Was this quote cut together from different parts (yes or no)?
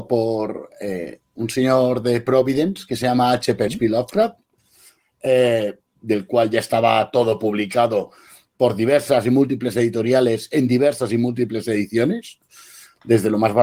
yes